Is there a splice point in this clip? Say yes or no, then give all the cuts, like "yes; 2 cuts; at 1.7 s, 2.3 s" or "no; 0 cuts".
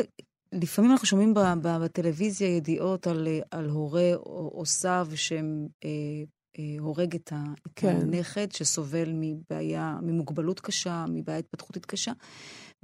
no; 0 cuts